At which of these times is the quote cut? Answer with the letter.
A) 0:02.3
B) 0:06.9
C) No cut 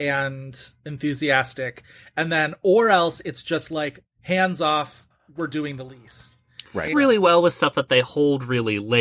B